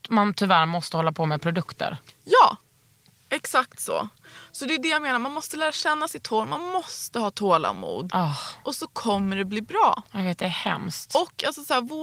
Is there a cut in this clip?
no; 0 cuts

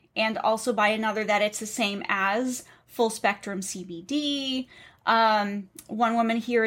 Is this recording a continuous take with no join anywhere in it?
yes; 0 cuts

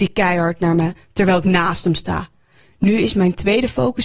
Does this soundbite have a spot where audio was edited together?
no; 0 cuts

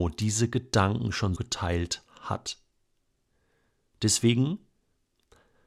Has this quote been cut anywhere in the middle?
yes; 1 cut; at 1.4 s

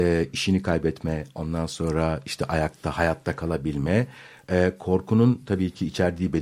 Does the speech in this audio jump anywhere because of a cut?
no; 0 cuts

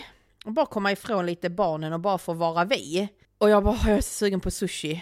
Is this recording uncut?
no; 1 cut; at 3.2 s

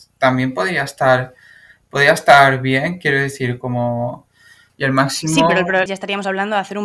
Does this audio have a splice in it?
yes; 2 cuts; at 4.7 s, 5.9 s

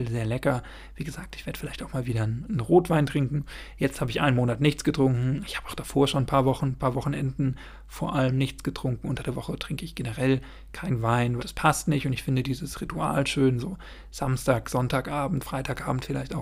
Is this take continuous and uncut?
no; 1 cut; at 11.4 s

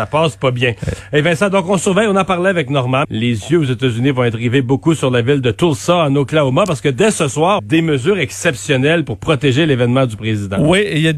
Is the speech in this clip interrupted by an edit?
yes; 2 cuts; at 3.0 s, 7.6 s

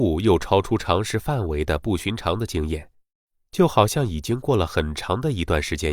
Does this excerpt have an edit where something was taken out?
no; 0 cuts

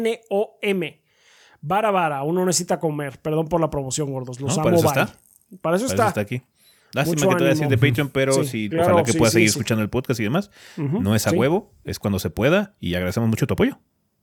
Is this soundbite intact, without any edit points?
no; 1 cut; at 8.7 s

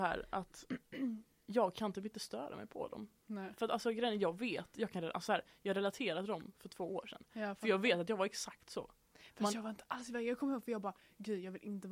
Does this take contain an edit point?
no; 0 cuts

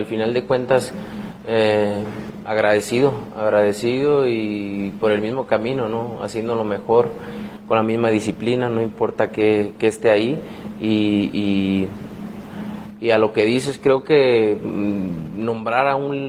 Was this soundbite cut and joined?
no; 0 cuts

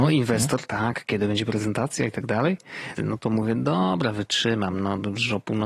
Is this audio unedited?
no; 1 cut; at 3.0 s

